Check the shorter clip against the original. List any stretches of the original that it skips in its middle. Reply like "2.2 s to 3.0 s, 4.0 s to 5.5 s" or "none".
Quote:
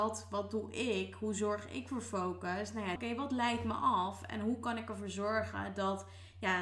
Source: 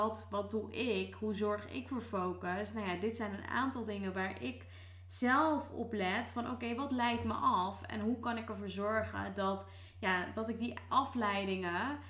3.0 s to 6.6 s